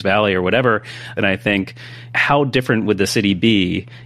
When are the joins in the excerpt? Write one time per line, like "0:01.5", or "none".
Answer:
none